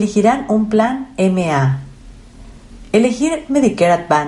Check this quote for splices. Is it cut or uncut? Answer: uncut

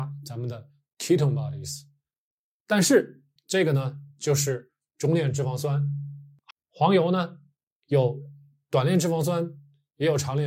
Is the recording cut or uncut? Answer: cut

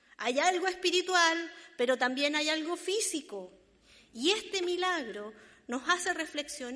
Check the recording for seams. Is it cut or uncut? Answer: uncut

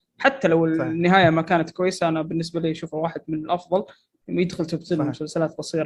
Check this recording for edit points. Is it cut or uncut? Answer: uncut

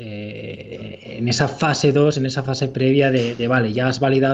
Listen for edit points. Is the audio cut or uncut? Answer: uncut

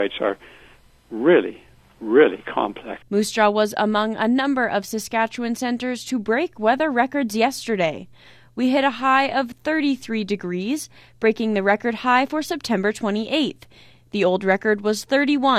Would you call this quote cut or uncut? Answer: cut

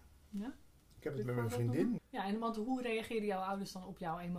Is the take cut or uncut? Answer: cut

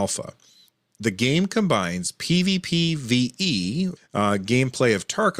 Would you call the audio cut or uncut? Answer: cut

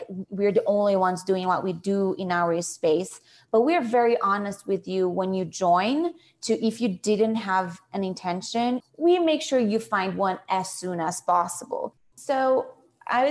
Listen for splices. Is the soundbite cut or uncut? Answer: cut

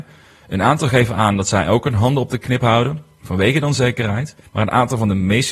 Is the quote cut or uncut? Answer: cut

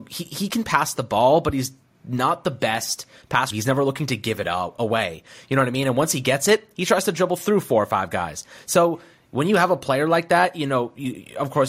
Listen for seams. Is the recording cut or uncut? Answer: cut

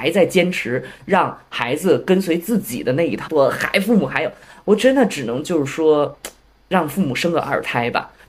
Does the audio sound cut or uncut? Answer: cut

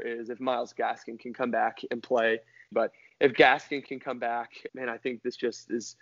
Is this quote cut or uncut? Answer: cut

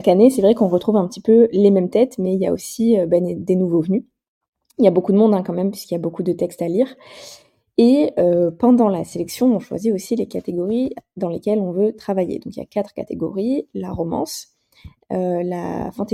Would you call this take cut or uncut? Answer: uncut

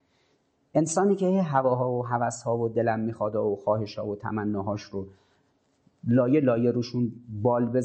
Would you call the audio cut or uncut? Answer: uncut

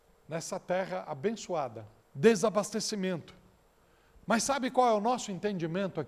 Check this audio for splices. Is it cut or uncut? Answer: cut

